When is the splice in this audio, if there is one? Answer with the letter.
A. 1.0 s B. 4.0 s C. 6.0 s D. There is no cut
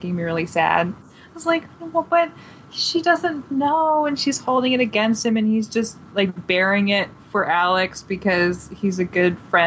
A